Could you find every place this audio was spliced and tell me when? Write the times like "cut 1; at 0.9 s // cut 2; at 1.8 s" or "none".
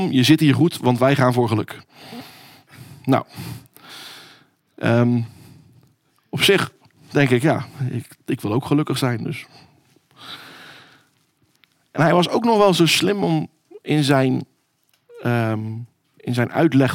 none